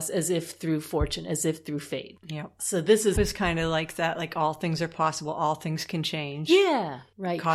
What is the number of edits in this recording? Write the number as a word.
one